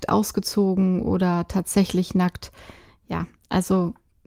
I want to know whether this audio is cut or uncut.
uncut